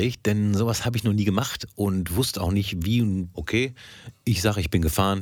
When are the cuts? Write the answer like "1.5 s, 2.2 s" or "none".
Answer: 3.3 s